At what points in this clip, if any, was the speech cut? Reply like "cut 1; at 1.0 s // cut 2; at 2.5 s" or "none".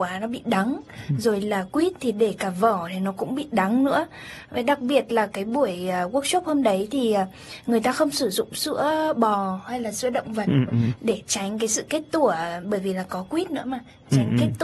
none